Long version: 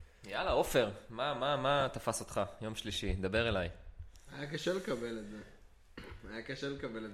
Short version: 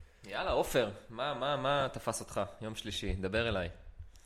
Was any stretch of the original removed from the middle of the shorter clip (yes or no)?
no